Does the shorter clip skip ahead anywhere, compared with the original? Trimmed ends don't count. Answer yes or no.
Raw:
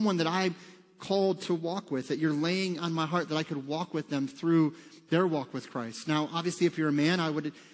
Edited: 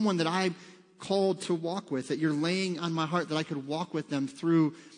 no